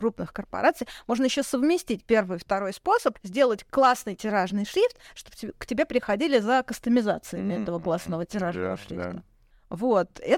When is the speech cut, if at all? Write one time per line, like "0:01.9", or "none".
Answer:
none